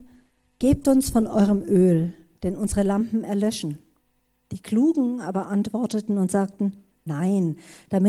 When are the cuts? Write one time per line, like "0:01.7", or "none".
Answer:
none